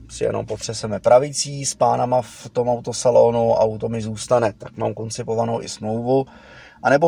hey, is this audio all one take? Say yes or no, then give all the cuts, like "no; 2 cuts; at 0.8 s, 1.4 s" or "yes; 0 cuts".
yes; 0 cuts